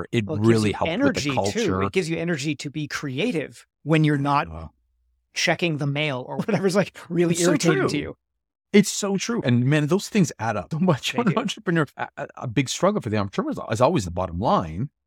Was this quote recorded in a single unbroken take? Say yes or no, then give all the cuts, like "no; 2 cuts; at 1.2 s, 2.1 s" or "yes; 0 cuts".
no; 3 cuts; at 9.4 s, 10.7 s, 11.9 s